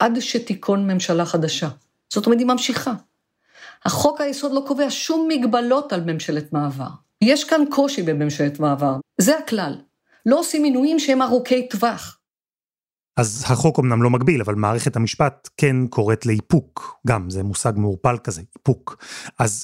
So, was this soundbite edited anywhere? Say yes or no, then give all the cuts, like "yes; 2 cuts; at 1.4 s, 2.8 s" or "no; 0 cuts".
yes; 2 cuts; at 7.2 s, 9.0 s